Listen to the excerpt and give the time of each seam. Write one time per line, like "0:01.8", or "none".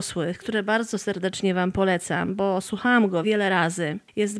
0:03.2